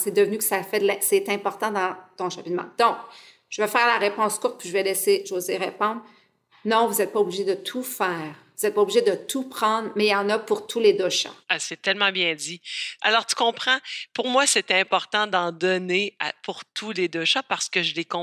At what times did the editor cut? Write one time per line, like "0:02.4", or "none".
0:11.4
0:13.0